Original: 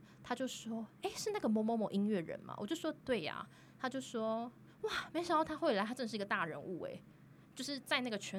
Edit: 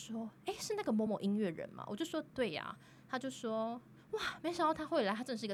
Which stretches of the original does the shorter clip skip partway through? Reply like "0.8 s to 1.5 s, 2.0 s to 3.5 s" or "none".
1.6 s to 1.8 s